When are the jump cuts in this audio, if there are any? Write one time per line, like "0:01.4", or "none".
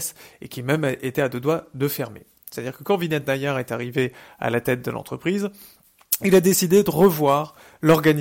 0:02.4

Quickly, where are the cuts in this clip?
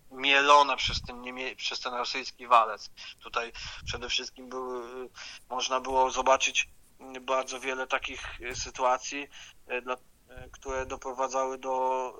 0:03.1

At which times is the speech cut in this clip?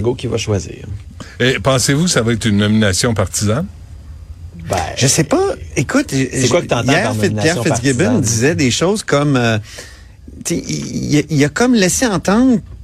none

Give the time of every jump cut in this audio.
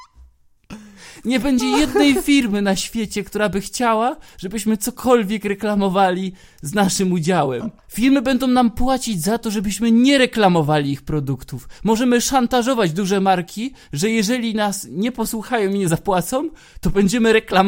0:07.8

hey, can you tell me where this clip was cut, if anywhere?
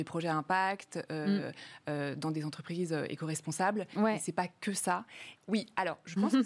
0:05.4

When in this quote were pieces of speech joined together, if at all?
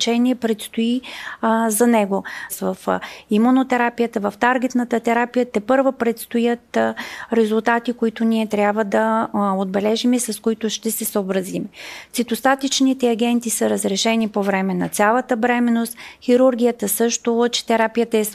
0:02.5

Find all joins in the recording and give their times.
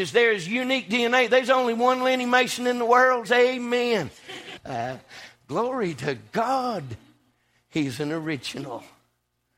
0:03.2
0:04.6

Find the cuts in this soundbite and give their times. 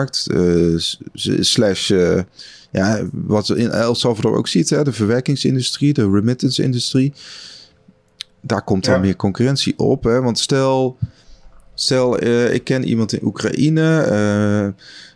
none

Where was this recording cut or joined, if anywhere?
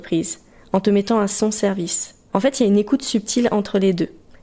0:02.3

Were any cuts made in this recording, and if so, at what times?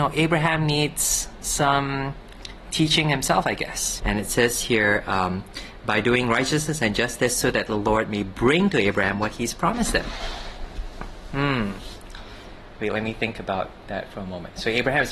0:04.0

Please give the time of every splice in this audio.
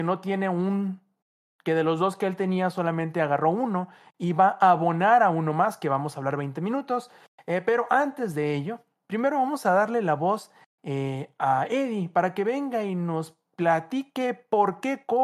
none

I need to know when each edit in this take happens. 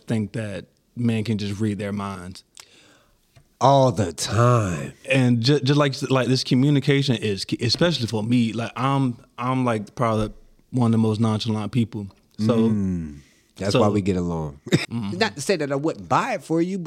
0:14.8

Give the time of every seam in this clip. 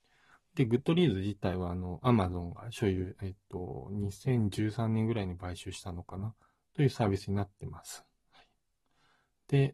none

